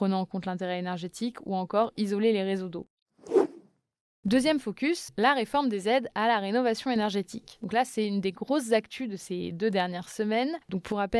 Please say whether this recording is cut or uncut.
uncut